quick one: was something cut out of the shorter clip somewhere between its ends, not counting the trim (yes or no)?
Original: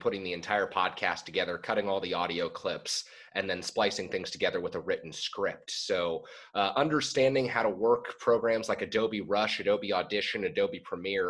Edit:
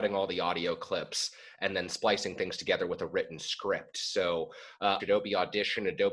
yes